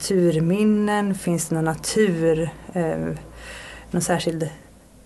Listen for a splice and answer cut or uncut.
uncut